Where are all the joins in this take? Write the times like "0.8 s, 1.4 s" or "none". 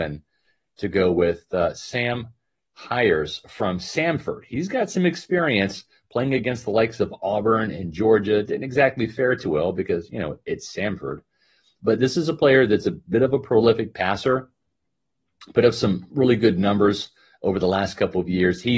none